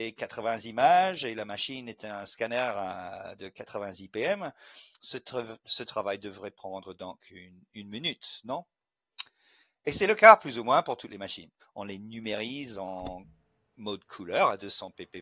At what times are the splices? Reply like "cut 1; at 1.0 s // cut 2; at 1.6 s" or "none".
cut 1; at 11.6 s